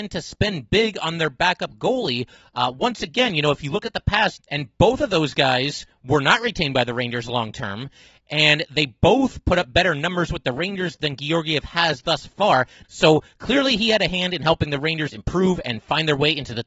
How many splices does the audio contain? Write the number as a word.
two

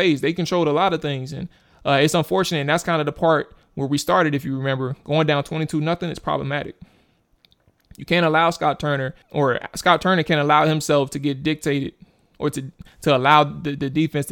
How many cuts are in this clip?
one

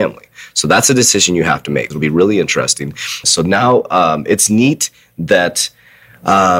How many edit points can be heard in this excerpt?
two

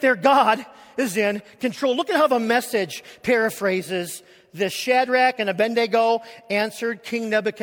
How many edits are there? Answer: one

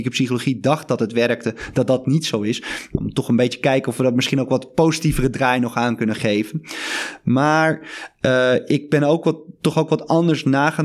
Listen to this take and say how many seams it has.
zero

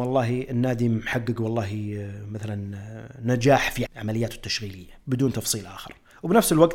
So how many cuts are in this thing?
two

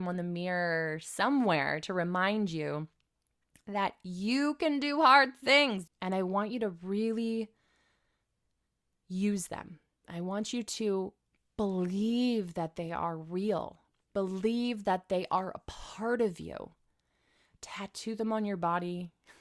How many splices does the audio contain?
one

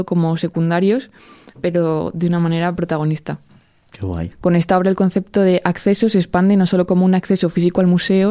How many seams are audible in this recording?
one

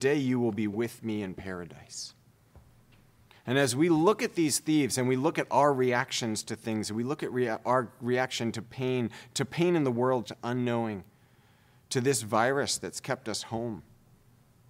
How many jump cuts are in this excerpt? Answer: one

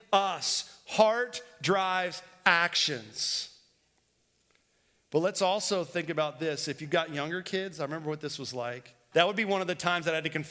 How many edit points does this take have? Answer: two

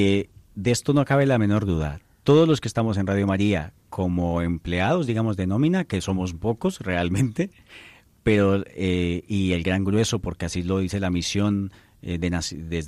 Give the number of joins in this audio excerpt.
zero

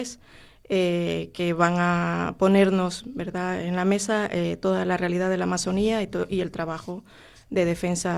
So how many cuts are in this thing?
zero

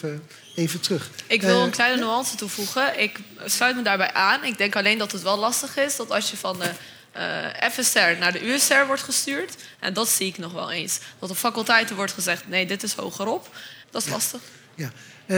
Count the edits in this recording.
two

